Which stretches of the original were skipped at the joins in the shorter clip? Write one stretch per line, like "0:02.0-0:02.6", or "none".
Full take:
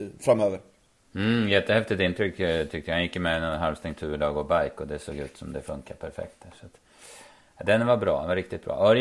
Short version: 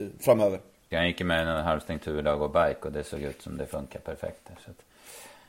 0:00.9-0:02.9